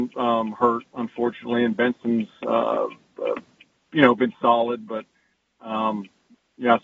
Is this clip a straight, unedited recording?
yes; 0 cuts

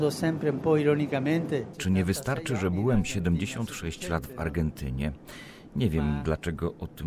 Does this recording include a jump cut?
yes; 1 cut; at 1.7 s

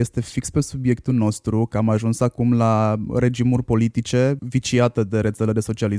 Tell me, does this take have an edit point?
yes; 2 cuts; at 3.1 s, 4.4 s

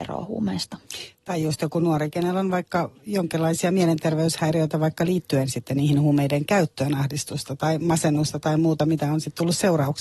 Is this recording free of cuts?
yes; 0 cuts

